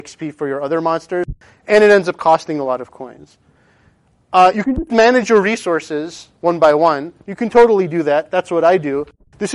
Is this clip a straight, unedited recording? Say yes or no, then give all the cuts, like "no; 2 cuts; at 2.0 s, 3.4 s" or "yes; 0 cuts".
yes; 0 cuts